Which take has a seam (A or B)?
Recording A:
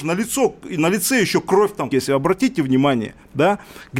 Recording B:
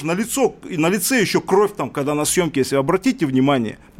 A